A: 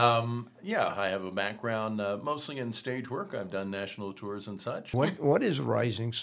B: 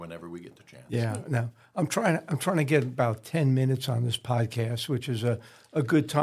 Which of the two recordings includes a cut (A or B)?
A